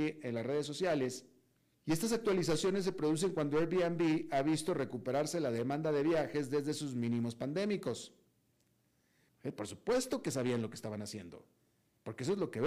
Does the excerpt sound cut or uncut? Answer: cut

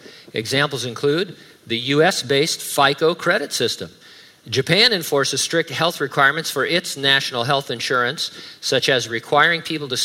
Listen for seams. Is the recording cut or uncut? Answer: uncut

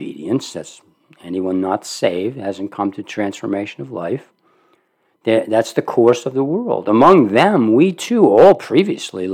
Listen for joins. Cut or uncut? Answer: uncut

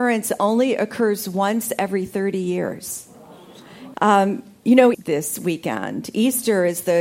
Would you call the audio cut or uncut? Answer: cut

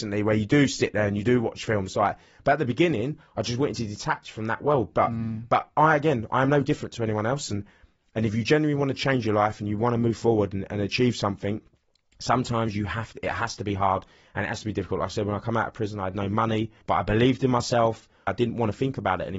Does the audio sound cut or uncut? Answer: cut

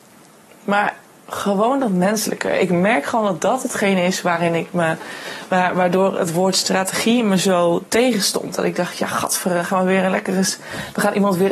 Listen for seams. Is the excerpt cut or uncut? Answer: uncut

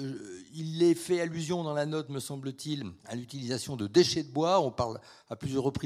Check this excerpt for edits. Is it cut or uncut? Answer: cut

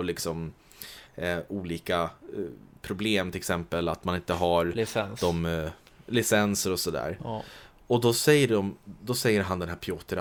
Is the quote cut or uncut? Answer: uncut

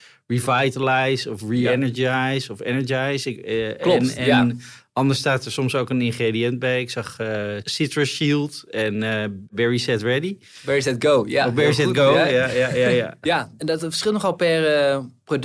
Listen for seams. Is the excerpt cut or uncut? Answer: uncut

